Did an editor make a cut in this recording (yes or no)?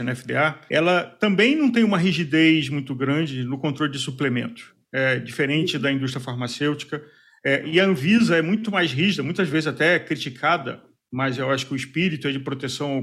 no